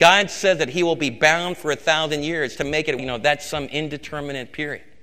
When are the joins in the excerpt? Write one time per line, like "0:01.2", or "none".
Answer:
0:03.0